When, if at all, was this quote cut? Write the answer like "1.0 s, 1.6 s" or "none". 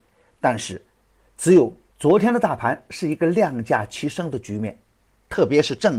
1.9 s